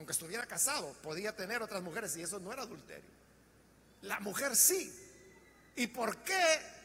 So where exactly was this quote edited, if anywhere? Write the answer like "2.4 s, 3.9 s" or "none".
none